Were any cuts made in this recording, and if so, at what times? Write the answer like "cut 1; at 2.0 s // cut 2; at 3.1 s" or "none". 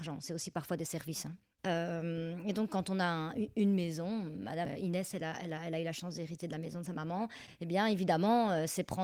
cut 1; at 1.6 s